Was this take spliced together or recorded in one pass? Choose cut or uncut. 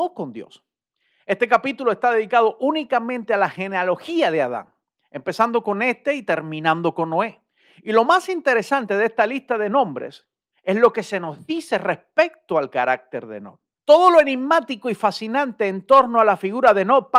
cut